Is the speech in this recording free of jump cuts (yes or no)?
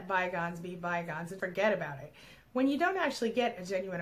no